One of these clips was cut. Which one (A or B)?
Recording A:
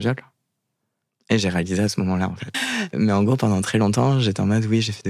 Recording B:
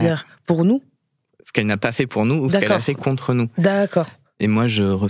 A